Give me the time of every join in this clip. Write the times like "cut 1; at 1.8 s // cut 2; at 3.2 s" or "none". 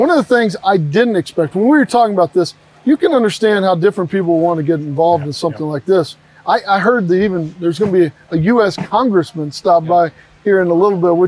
none